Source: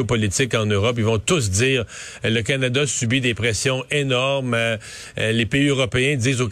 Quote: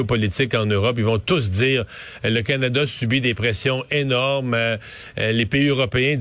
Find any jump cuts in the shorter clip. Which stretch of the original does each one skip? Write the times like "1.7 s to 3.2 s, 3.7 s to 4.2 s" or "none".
none